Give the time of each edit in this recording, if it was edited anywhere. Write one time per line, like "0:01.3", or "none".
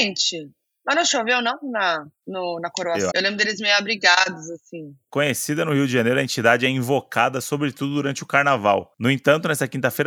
0:03.1